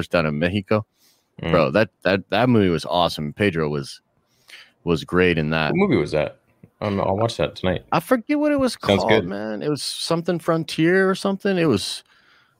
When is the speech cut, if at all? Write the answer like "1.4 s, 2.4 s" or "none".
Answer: none